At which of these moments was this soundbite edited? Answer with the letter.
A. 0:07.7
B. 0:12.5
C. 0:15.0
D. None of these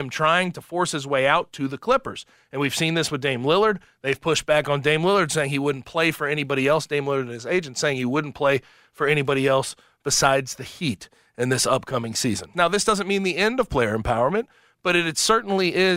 B